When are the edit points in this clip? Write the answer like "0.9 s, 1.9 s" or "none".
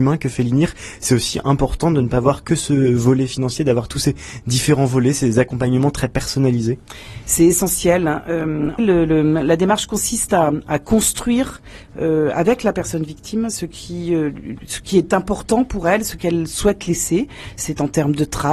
8.8 s